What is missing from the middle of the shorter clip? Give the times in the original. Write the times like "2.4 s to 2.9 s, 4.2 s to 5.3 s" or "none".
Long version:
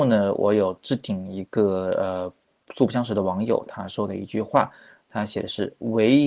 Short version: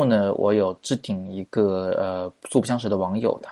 2.4 s to 2.6 s

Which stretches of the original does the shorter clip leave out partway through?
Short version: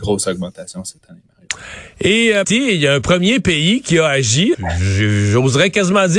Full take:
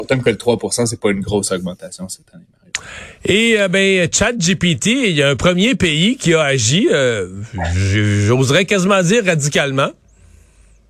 3.7 s to 4.8 s, 6.9 s to 7.5 s

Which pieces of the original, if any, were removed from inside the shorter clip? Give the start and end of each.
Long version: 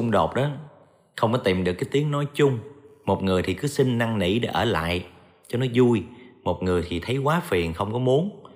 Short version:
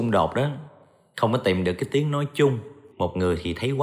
2.9 s to 6.4 s

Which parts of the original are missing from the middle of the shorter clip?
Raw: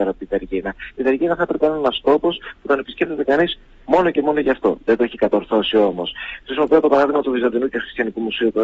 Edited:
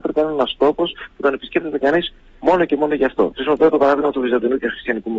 4.8 s to 6.4 s

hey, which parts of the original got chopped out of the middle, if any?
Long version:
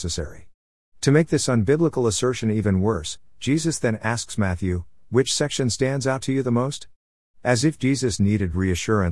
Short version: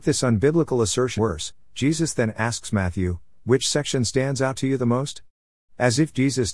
2.4 s to 2.8 s

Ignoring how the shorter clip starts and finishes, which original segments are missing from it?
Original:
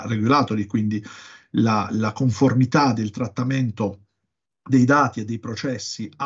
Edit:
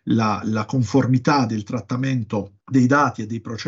4.1 s to 4.6 s

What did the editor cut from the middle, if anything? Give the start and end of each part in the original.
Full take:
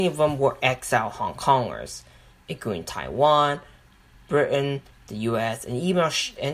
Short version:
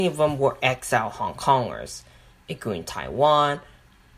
none

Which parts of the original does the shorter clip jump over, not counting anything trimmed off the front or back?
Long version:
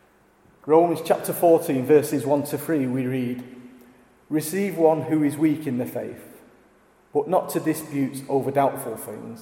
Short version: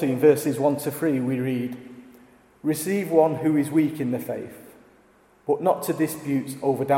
none

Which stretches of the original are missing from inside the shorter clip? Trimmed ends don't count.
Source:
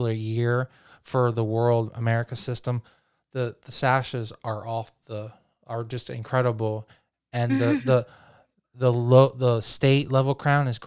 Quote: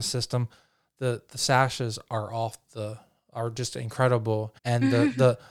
6.9 s to 7.3 s

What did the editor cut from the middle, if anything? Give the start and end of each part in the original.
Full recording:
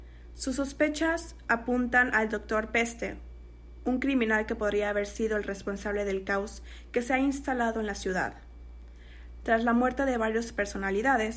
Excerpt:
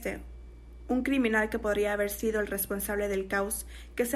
none

